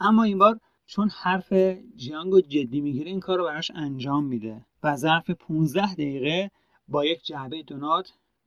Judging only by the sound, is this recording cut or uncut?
cut